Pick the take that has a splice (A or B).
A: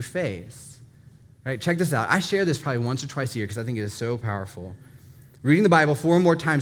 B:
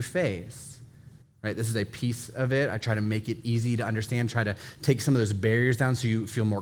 B